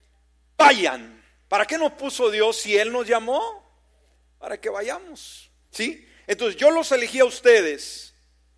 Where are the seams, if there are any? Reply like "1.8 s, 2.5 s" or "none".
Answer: 5.7 s